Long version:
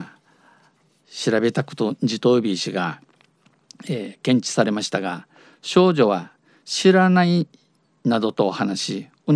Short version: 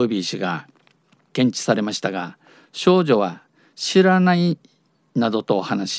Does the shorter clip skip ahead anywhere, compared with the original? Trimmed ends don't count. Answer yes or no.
yes